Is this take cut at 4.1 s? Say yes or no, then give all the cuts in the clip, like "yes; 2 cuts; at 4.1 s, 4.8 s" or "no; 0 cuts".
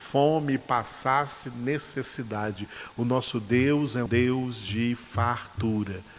yes; 1 cut; at 4.1 s